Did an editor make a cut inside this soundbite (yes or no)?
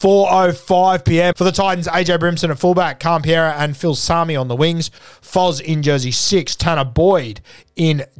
yes